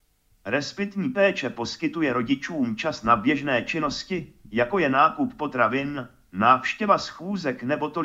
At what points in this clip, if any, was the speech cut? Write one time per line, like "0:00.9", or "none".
none